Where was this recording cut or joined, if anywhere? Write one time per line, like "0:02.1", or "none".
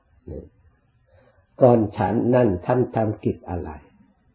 none